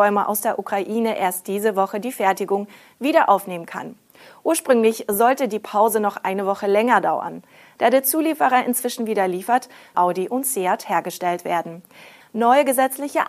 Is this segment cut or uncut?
cut